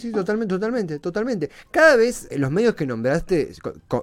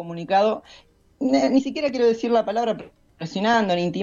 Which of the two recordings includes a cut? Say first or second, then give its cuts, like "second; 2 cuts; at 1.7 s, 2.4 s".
first; 1 cut; at 2.3 s